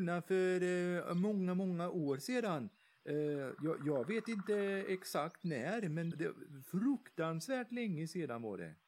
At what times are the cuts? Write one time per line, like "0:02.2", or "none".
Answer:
0:06.1